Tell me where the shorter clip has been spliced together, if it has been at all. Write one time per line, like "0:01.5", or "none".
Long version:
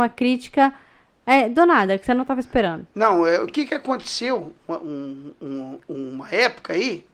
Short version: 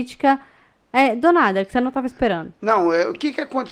none